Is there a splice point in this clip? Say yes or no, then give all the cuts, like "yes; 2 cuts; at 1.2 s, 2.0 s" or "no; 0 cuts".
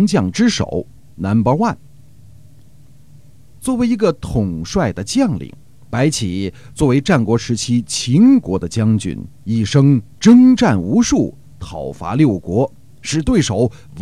yes; 1 cut; at 5.8 s